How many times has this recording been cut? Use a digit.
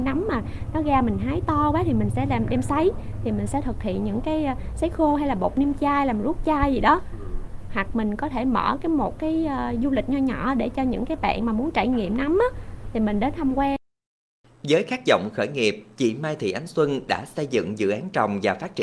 0